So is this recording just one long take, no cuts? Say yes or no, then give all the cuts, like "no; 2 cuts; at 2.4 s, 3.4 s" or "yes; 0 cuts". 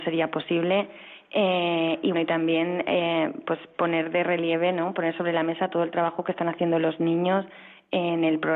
no; 1 cut; at 2.1 s